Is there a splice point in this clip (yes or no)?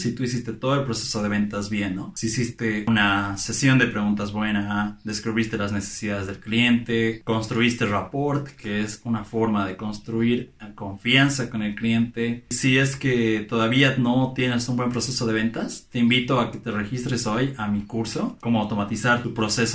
yes